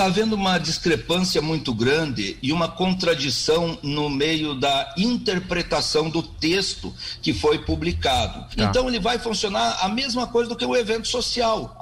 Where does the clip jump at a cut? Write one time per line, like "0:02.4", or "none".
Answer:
0:08.5